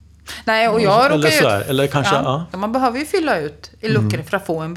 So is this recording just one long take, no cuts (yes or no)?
no